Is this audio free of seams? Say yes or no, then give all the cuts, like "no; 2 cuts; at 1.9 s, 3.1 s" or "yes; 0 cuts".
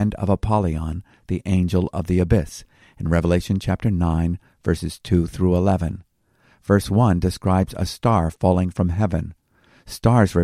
yes; 0 cuts